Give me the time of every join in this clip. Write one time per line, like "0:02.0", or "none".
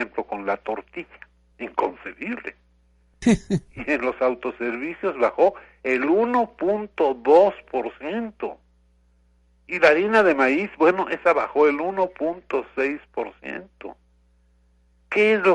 0:01.5